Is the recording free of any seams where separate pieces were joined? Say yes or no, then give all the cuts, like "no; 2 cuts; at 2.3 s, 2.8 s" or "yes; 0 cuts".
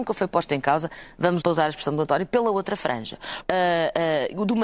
no; 2 cuts; at 1.4 s, 3.4 s